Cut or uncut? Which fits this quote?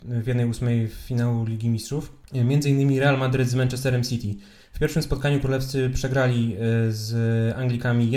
uncut